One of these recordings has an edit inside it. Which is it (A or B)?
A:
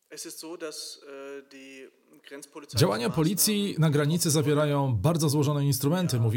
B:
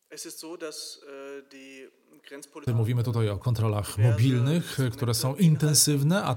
B